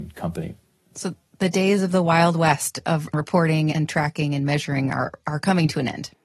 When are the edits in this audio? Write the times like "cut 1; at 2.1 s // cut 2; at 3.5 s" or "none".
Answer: cut 1; at 3.7 s